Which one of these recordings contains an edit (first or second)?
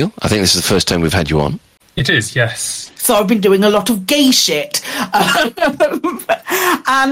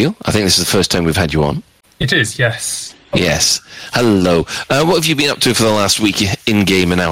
first